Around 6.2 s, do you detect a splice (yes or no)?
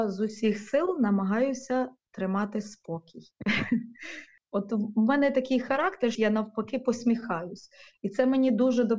yes